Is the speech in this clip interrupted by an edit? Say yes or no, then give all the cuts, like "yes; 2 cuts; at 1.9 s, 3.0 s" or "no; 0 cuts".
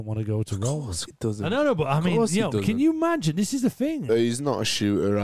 yes; 2 cuts; at 1.1 s, 4.1 s